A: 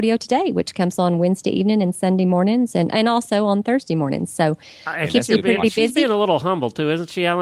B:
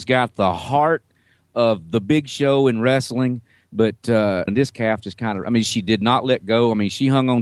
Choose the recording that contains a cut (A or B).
B